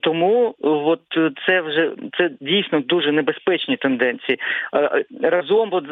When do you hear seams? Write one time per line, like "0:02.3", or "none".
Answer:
none